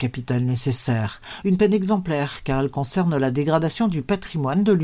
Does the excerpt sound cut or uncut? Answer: cut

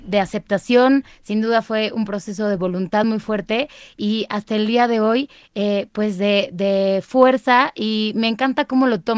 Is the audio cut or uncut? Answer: uncut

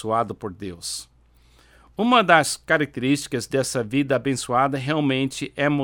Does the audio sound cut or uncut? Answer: uncut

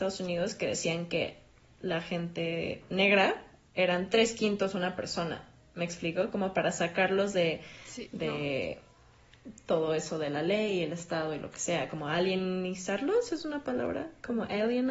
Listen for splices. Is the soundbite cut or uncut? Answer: uncut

